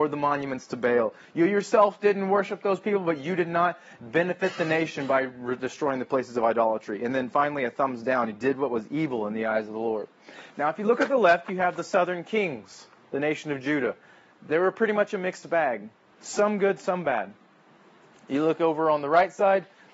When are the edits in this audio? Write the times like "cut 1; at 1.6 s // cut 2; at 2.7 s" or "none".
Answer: none